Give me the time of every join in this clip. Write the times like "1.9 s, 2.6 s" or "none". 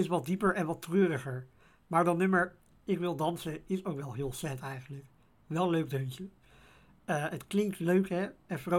none